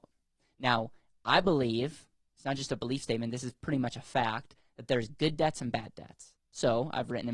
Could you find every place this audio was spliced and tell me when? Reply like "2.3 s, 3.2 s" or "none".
6.4 s

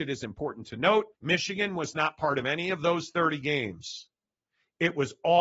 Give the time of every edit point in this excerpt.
1.1 s

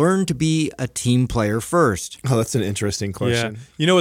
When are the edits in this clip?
none

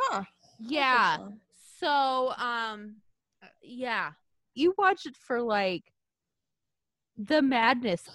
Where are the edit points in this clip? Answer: 4.5 s

